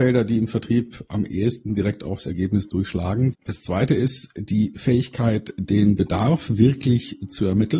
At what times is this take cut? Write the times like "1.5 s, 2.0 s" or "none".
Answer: 3.3 s